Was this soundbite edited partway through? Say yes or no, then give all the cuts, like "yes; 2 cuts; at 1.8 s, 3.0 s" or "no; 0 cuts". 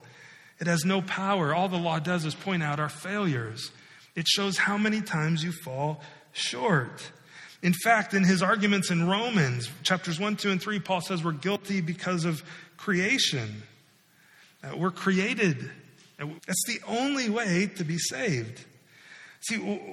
yes; 1 cut; at 16.4 s